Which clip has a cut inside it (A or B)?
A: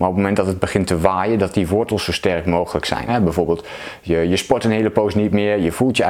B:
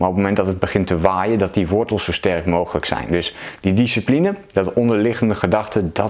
A